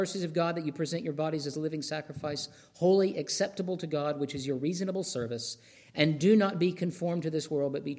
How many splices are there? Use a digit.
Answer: 0